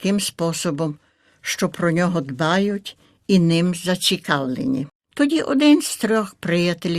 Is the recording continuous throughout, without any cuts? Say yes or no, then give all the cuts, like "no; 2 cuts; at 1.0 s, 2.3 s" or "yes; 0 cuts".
no; 1 cut; at 4.9 s